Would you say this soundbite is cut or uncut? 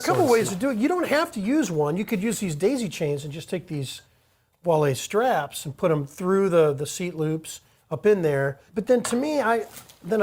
cut